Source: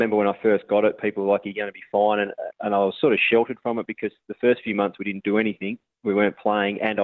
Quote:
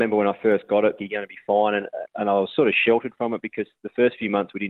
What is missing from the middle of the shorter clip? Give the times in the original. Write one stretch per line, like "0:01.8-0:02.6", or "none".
0:01.0-0:01.4